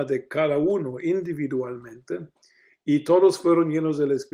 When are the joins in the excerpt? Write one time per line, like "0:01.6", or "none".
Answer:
none